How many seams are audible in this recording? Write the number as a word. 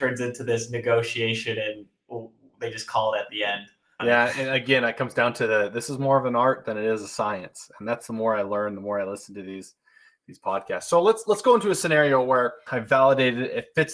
two